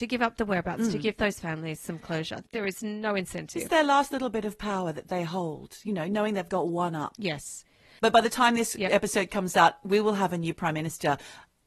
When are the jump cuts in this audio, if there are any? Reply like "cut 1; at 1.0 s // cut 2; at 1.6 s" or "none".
cut 1; at 8.0 s